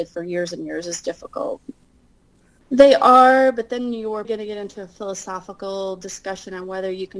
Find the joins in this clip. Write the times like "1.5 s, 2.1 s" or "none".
2.6 s, 4.2 s